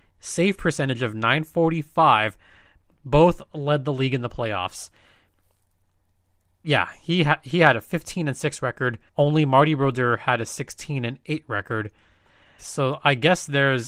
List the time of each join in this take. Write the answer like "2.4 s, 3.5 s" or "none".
9.1 s, 12.6 s